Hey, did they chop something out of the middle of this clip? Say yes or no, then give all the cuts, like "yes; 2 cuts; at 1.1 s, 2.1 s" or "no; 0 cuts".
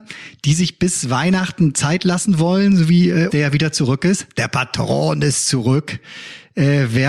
yes; 1 cut; at 3.3 s